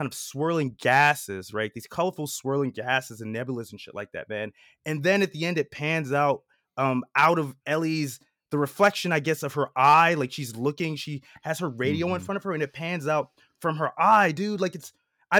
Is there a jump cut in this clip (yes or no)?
no